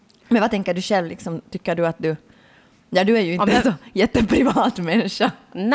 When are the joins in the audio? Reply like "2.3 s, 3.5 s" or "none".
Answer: none

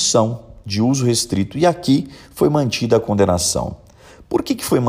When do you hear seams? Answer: none

